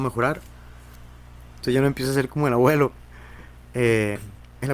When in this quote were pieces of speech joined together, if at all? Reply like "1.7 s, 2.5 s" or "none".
1.5 s